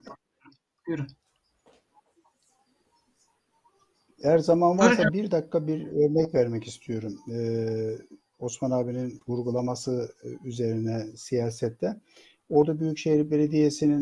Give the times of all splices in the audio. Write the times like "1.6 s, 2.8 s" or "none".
none